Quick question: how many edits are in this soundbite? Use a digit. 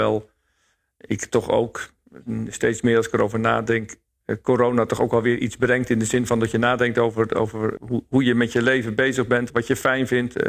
2